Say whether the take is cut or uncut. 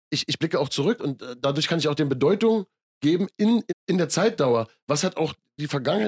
cut